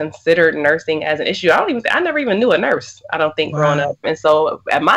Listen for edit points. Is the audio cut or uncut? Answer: cut